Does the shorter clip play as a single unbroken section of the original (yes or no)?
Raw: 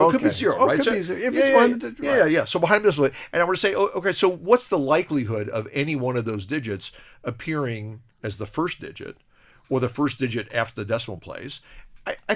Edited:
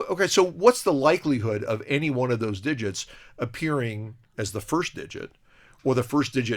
yes